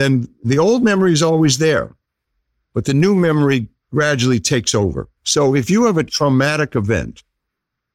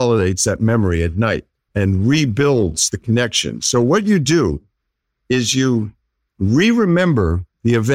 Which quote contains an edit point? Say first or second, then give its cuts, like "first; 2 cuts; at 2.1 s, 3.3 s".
first; 1 cut; at 5.2 s